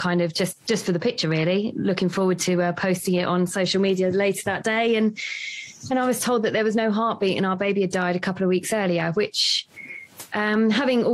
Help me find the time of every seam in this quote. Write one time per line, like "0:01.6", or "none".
none